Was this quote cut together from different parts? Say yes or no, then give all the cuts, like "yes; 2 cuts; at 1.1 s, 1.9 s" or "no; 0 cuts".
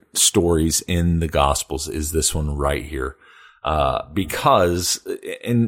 no; 0 cuts